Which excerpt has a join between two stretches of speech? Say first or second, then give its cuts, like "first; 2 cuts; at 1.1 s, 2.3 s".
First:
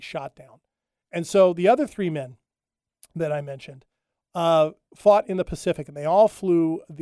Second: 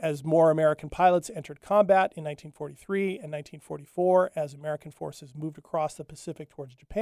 first; 1 cut; at 1.0 s